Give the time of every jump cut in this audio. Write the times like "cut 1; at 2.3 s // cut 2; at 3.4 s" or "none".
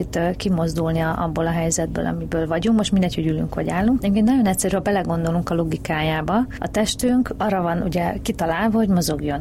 cut 1; at 4.0 s